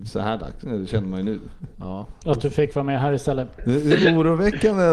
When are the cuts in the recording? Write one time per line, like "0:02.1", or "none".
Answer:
0:03.6